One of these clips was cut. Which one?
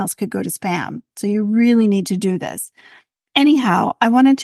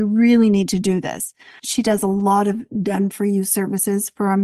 second; 1 cut; at 1.6 s

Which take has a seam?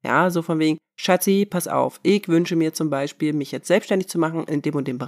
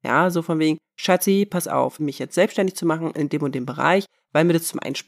second; 1 cut; at 2.0 s

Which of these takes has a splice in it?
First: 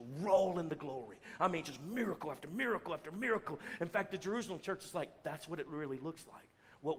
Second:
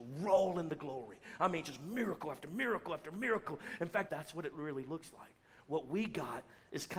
second; 1 cut; at 4.1 s

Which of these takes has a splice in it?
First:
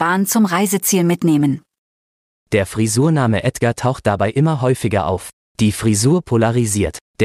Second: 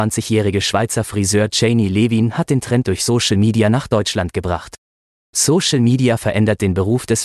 first; 2 cuts; at 2.3 s, 5.5 s

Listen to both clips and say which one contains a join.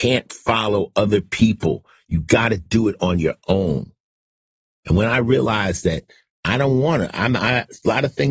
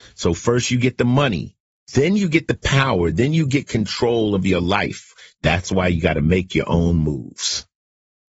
second; 1 cut; at 5.4 s

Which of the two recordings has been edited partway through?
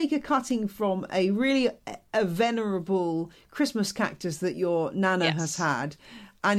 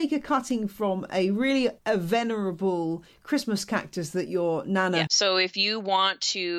second; 2 cuts; at 1.8 s, 5.1 s

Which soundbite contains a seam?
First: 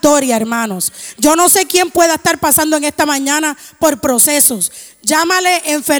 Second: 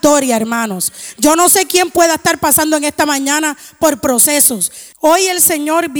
second; 1 cut; at 4.9 s

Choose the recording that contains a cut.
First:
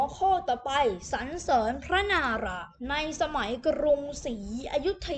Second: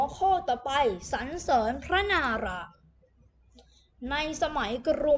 first; 1 cut; at 2.8 s

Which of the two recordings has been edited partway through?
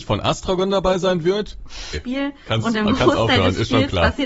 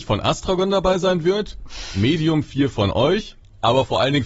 first; 1 cut; at 1.9 s

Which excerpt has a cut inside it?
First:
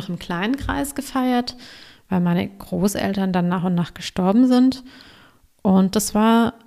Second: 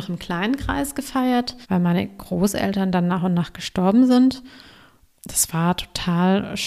second; 2 cuts; at 1.6 s, 5.2 s

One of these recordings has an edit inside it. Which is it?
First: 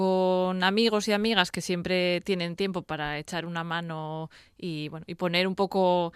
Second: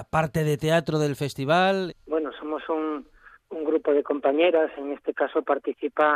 second; 1 cut; at 1.9 s

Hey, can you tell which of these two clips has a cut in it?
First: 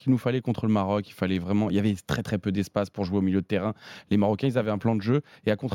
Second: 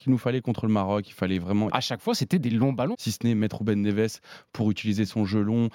second; 2 cuts; at 1.7 s, 2.9 s

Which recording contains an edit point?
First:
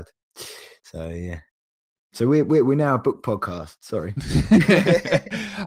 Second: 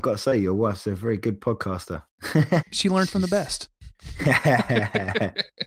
second; 1 cut; at 2.6 s

